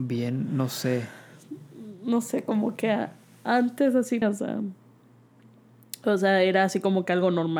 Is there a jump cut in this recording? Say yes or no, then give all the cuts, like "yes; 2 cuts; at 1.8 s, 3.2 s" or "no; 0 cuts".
yes; 1 cut; at 4.2 s